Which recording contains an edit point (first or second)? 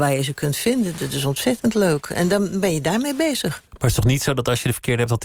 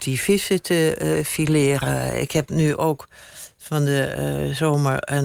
first